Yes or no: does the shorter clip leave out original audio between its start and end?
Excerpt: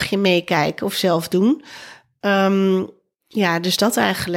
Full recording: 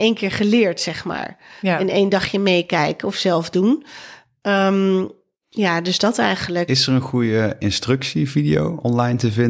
no